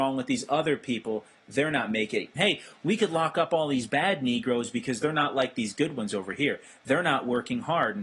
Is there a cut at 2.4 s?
yes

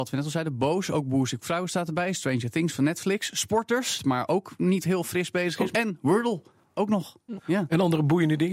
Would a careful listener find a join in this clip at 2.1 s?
no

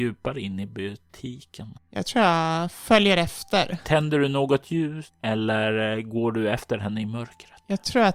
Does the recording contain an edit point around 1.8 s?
no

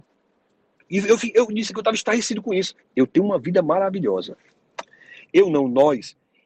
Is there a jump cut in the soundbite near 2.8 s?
yes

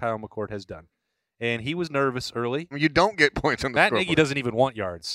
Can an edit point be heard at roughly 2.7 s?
yes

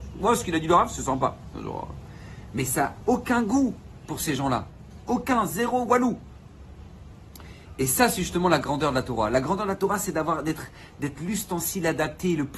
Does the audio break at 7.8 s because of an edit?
no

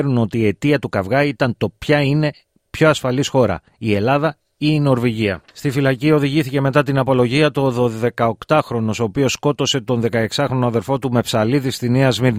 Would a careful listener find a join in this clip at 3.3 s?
no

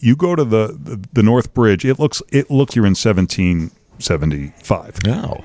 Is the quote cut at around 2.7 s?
yes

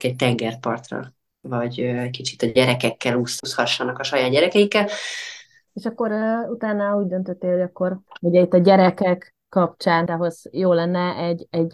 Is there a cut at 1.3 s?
no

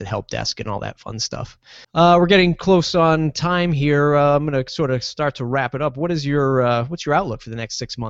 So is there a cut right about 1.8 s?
yes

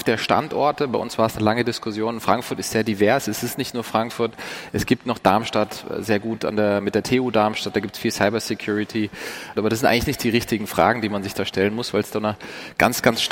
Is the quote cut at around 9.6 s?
yes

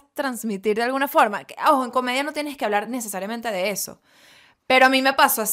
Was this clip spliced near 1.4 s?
no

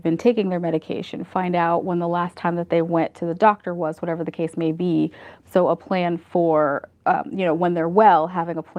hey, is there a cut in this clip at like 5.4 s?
yes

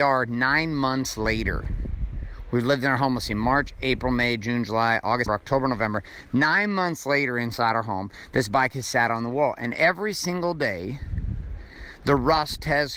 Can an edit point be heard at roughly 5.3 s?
yes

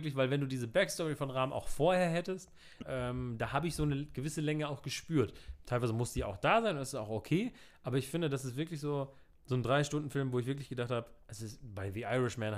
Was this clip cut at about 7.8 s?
no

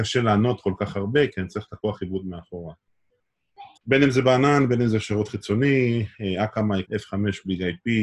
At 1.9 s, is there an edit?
no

